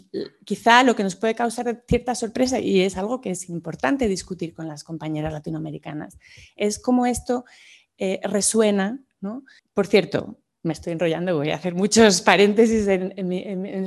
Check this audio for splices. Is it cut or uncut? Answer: cut